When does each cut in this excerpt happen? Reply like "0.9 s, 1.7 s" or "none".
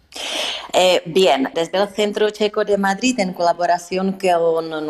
1.5 s